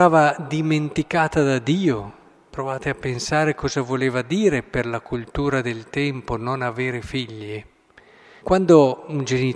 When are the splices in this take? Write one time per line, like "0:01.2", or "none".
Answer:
0:08.4